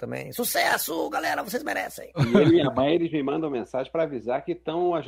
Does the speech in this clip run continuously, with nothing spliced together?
yes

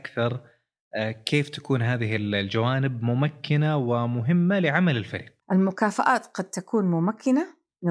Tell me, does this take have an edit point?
yes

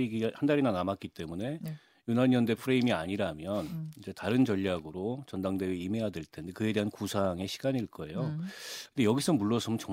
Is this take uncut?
yes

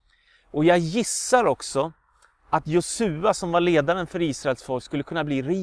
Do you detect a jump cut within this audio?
no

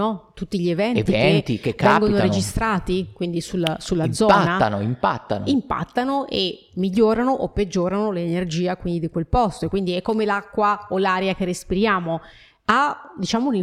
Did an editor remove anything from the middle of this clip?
no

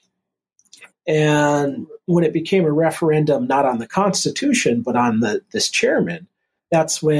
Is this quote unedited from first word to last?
no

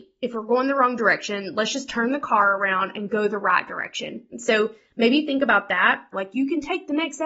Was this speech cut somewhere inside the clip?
yes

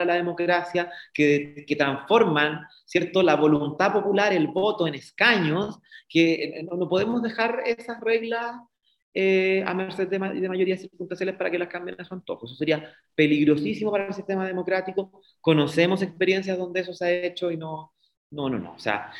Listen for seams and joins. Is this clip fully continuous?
yes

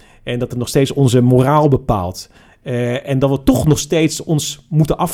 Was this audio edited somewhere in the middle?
no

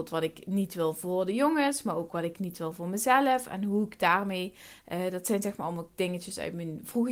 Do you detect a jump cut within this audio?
no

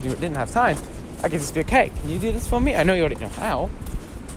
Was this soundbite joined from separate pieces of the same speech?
no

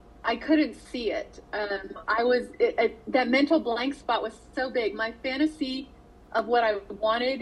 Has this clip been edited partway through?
no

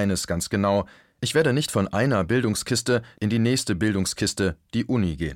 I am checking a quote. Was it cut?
yes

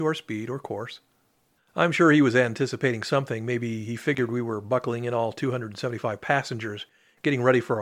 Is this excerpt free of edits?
no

